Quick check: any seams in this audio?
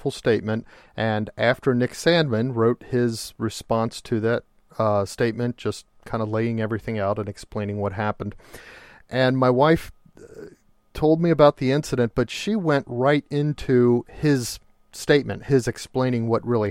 no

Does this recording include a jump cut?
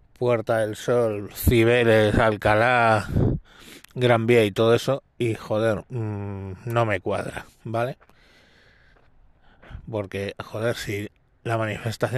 no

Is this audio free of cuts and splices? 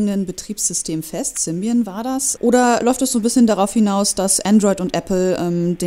no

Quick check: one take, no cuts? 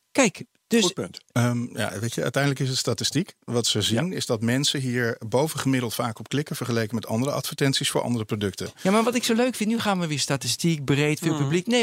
yes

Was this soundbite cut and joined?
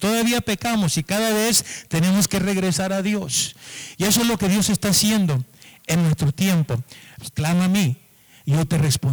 yes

